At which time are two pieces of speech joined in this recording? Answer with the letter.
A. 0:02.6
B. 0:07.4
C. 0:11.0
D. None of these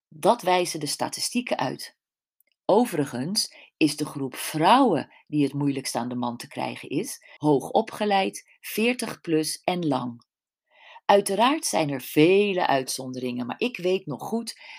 B